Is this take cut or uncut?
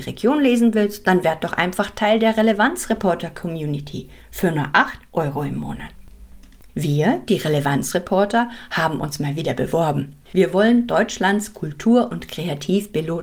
cut